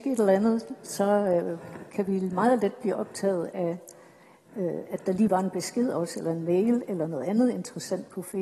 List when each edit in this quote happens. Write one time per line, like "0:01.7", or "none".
none